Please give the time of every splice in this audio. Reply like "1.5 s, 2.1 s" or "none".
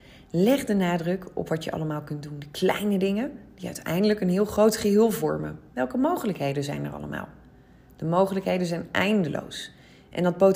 5.7 s